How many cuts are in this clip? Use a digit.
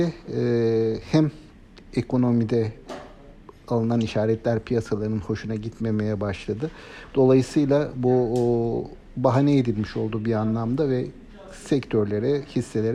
1